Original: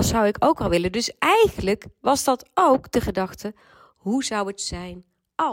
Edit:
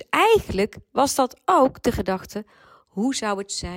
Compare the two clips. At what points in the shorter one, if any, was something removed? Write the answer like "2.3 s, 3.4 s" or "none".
none